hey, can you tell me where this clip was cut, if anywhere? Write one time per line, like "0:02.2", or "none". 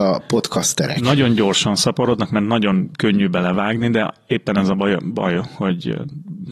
none